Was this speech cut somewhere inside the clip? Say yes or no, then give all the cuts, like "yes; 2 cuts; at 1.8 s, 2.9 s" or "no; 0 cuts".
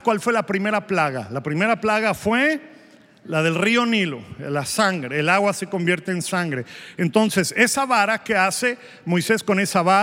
no; 0 cuts